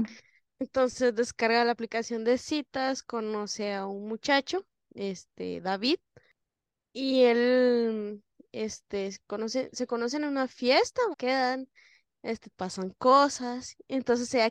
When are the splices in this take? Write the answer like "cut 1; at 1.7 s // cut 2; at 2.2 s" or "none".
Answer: cut 1; at 11.1 s // cut 2; at 12.5 s